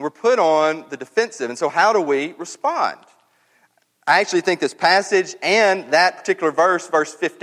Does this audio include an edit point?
no; 0 cuts

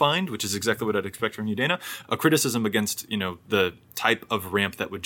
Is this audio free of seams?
no; 1 cut; at 2.0 s

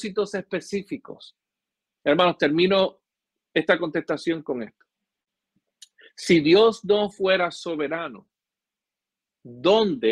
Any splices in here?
no; 0 cuts

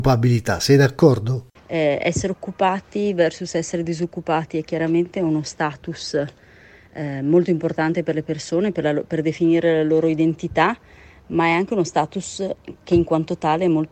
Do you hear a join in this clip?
yes; 1 cut; at 1.6 s

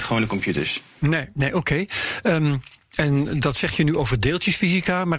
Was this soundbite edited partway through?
no; 0 cuts

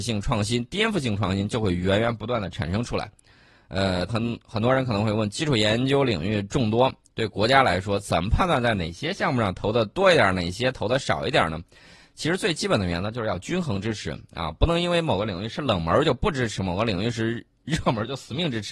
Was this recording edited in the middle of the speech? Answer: yes; 1 cut; at 4.1 s

